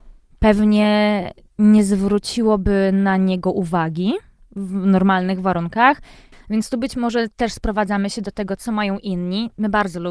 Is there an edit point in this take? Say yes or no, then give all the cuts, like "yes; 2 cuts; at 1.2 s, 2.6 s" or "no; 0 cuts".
yes; 2 cuts; at 6.3 s, 8.6 s